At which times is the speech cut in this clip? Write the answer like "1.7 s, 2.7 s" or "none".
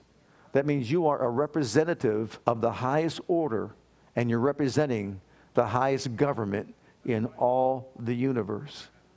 2.4 s